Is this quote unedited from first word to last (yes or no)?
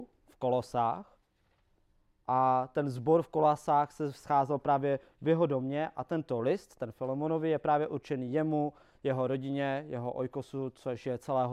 yes